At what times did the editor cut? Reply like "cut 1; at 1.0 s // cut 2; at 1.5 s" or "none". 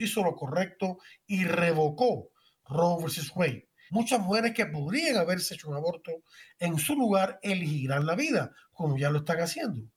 cut 1; at 3.9 s